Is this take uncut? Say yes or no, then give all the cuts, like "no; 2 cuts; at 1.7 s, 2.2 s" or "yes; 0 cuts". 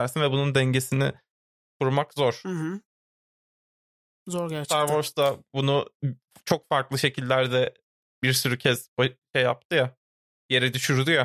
yes; 0 cuts